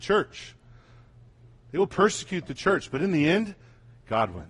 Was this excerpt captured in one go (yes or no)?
yes